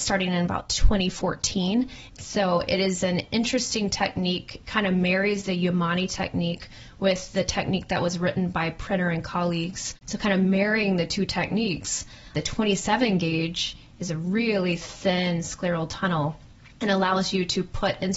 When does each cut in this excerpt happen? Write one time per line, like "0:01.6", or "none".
0:02.1
0:10.0
0:12.3